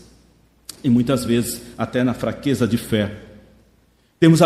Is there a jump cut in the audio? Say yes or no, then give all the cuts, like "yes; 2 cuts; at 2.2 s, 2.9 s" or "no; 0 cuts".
no; 0 cuts